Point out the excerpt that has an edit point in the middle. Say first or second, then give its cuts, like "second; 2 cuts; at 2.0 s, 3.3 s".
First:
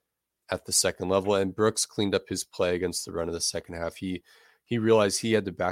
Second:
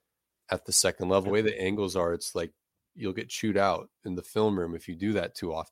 second; 1 cut; at 1.3 s